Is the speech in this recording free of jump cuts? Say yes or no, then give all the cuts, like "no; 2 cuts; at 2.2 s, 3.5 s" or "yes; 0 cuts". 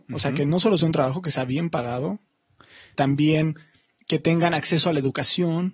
no; 1 cut; at 2.9 s